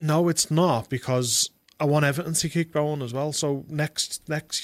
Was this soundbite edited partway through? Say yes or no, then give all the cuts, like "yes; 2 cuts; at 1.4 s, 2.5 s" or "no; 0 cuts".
no; 0 cuts